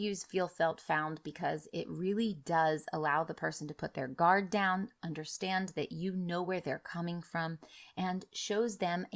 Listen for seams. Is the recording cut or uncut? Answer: uncut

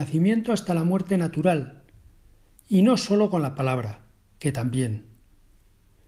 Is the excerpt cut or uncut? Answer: uncut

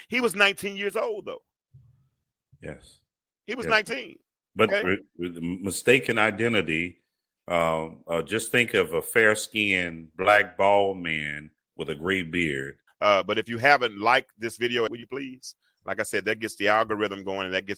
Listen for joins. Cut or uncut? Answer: cut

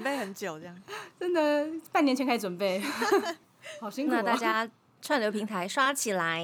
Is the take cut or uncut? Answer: uncut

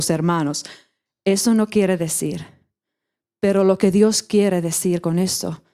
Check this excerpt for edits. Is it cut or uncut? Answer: uncut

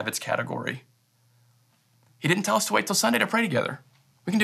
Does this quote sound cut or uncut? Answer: cut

